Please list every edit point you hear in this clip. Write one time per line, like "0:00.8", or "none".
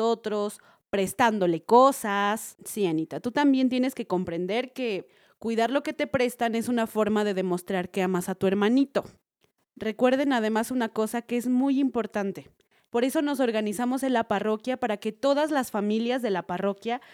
0:02.5
0:12.8